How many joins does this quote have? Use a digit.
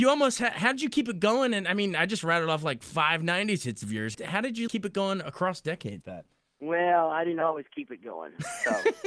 2